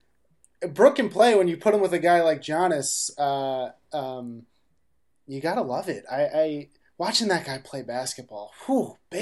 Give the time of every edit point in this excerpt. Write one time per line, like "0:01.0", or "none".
none